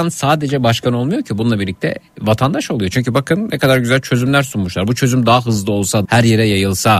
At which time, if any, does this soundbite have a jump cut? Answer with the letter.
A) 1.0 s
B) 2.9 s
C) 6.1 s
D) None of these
C